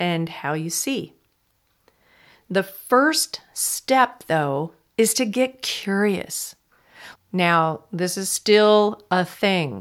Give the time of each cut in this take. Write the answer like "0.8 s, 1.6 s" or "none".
7.2 s